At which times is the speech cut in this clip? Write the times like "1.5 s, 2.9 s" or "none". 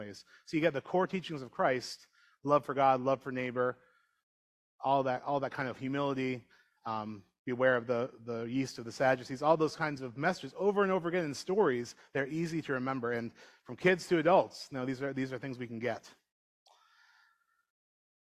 none